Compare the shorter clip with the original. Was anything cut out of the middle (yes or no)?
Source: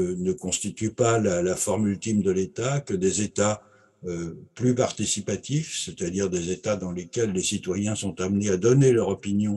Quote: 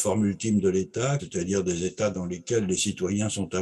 yes